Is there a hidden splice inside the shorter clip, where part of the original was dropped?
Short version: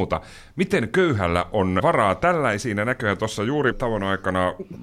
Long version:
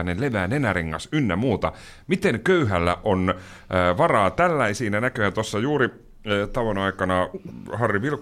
yes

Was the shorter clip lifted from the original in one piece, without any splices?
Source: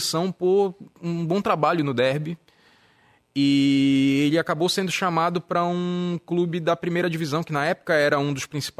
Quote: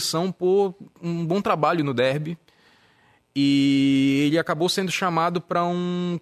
yes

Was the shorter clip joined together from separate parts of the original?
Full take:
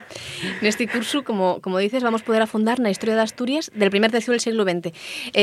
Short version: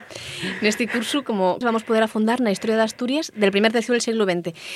yes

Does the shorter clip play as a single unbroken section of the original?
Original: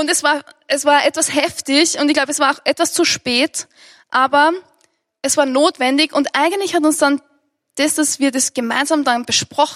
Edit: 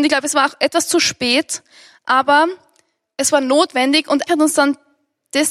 no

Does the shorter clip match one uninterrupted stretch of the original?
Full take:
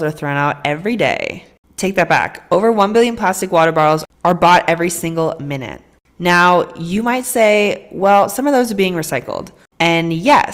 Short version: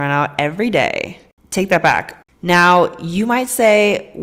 no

